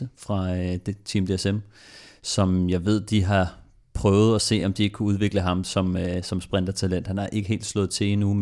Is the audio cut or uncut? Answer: uncut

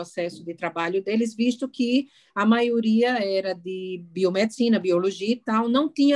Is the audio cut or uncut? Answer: uncut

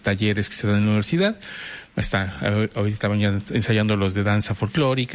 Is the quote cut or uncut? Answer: uncut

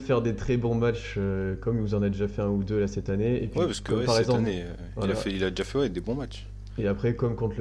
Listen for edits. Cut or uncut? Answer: uncut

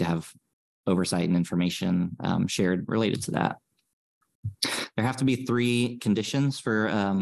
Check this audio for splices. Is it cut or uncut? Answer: uncut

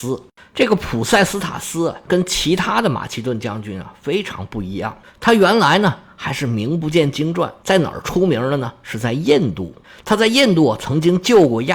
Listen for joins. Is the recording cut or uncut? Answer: uncut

